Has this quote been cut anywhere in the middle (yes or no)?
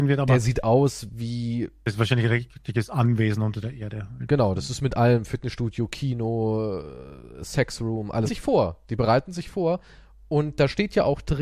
yes